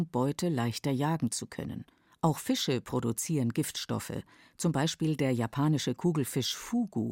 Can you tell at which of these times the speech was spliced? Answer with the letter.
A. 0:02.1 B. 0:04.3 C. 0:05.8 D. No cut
A